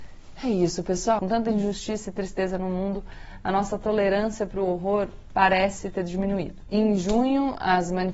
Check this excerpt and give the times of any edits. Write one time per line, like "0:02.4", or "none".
0:01.2
0:06.7